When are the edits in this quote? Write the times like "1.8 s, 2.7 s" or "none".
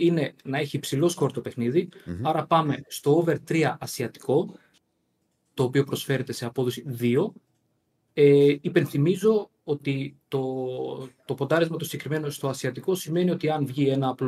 none